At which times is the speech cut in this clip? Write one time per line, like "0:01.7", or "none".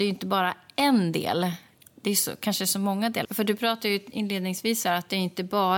0:03.2